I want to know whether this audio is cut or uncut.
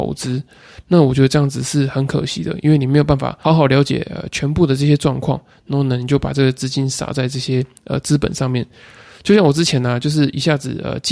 cut